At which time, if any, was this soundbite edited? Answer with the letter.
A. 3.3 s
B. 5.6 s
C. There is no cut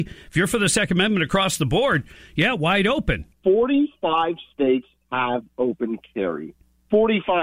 A